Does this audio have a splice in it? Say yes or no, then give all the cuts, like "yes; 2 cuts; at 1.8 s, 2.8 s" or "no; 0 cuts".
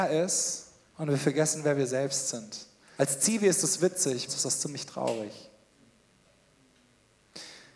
yes; 2 cuts; at 3.0 s, 4.3 s